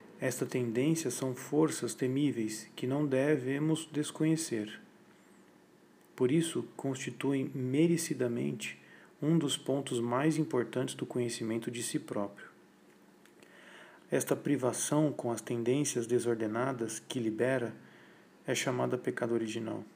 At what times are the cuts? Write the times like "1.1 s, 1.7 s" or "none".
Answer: 14.0 s